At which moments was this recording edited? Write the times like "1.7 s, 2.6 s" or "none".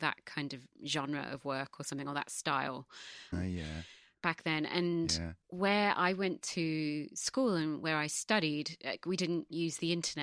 3.3 s